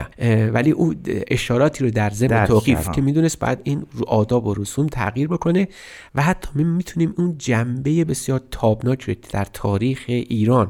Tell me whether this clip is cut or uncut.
cut